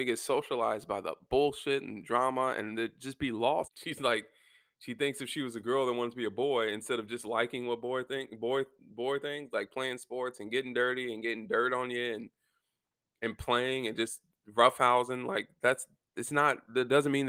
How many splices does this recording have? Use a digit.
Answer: 1